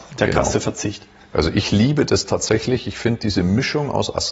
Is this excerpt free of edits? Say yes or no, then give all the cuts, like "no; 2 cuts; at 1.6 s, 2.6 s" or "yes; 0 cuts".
yes; 0 cuts